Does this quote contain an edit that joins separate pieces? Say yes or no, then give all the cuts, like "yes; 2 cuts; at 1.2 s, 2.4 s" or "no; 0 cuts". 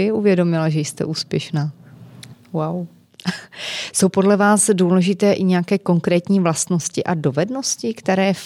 yes; 1 cut; at 2.3 s